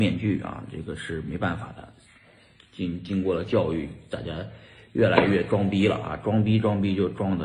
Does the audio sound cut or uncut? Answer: uncut